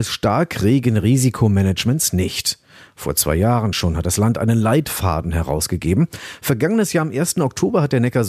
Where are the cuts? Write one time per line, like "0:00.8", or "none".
none